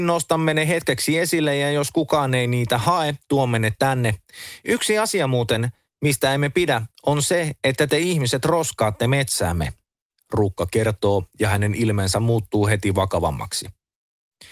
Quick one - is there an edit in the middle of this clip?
no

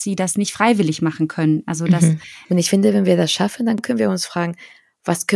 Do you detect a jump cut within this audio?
yes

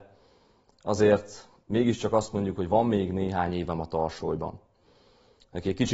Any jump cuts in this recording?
no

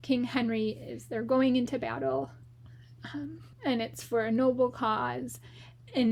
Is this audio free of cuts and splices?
no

